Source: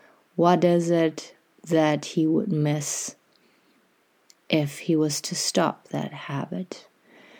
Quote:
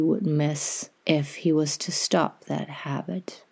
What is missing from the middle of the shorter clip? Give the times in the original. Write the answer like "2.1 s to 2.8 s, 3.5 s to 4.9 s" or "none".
3.2 s to 4.4 s